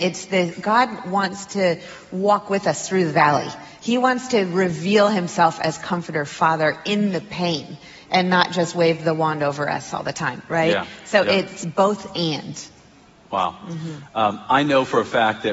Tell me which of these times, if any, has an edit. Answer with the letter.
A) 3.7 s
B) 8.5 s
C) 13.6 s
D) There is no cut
D